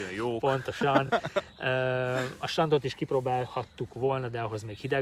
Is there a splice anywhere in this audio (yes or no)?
no